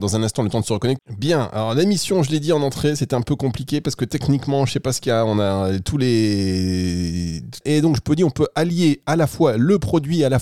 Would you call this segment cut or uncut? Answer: cut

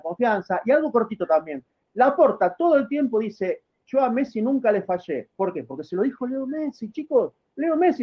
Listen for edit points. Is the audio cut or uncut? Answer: uncut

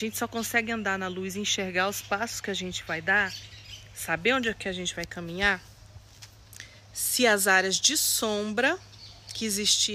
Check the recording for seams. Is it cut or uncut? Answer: uncut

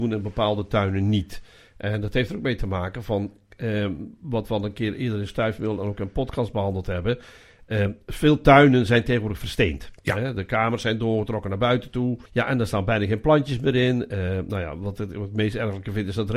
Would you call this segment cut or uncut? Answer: cut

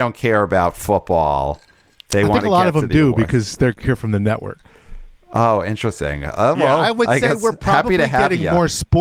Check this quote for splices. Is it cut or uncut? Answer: uncut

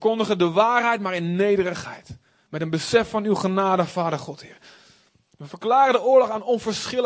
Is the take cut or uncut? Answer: uncut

